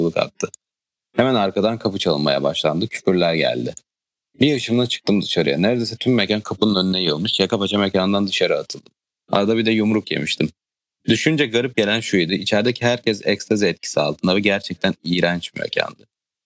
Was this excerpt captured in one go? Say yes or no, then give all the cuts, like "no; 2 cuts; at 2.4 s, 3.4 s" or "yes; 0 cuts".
yes; 0 cuts